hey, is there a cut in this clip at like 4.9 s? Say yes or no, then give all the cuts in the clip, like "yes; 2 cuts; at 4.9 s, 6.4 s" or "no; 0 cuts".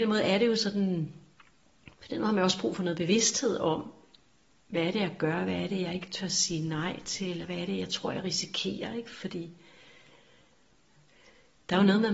no; 1 cut; at 7.4 s